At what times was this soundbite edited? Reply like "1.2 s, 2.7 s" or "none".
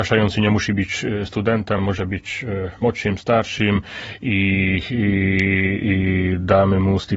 none